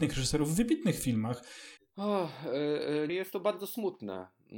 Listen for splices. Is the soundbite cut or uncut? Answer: cut